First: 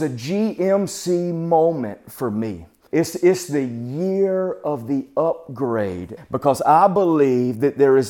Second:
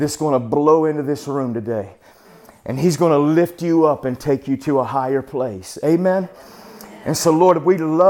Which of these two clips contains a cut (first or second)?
first